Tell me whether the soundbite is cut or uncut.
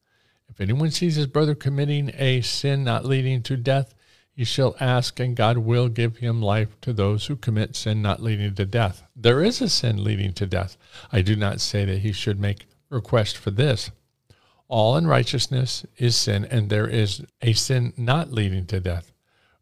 uncut